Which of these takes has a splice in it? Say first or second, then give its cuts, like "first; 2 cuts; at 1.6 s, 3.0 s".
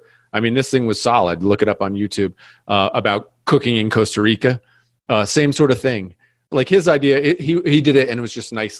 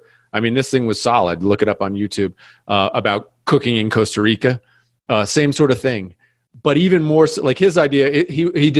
first; 1 cut; at 6.5 s